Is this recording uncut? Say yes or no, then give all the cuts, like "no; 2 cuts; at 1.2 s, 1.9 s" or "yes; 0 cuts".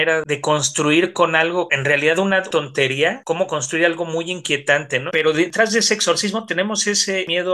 no; 1 cut; at 5.1 s